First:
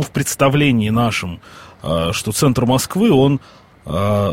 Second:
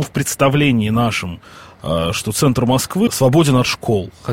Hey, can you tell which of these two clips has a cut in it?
second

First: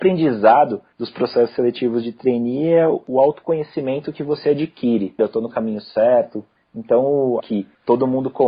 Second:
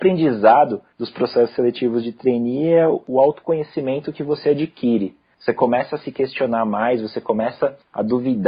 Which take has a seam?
first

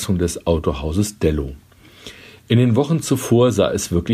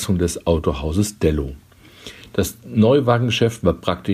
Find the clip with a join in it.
second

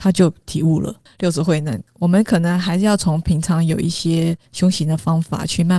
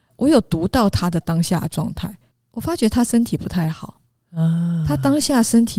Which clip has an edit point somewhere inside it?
first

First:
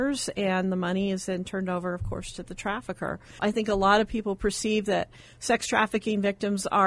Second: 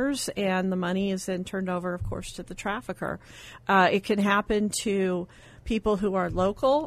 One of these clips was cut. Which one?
first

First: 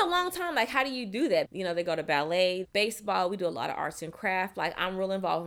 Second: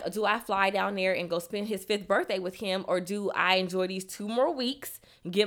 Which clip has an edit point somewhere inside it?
first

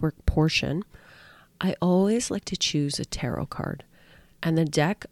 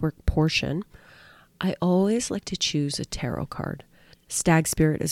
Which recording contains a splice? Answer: second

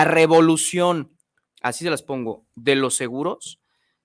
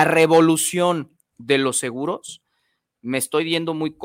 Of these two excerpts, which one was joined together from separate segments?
second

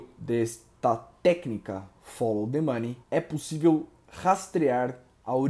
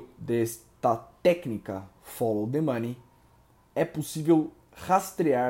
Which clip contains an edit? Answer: first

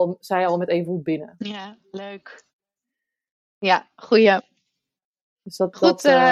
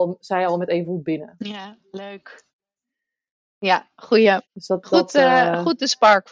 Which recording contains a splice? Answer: second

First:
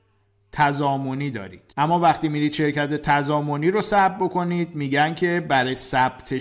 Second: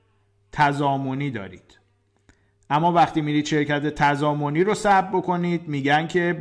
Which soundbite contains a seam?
first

